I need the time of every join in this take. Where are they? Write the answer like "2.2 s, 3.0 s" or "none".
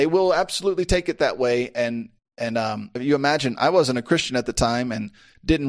3.0 s